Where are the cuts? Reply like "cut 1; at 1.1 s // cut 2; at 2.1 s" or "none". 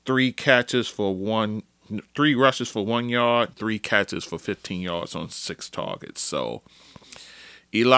cut 1; at 3.5 s